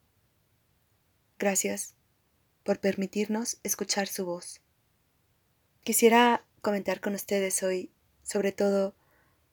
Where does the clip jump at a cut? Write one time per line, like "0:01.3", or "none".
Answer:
0:05.8